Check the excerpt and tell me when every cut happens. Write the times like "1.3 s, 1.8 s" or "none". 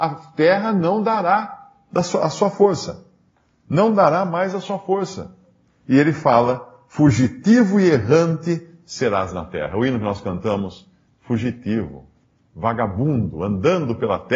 11.1 s